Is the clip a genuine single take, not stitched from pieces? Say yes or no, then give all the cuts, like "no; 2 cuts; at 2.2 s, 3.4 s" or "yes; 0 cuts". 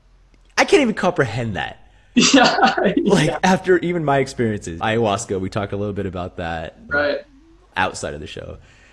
no; 2 cuts; at 4.8 s, 6.9 s